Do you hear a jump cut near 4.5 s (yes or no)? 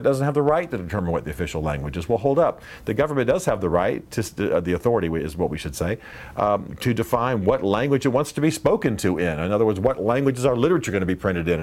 no